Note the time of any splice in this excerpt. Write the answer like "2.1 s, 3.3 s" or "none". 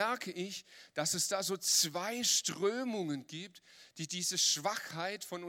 none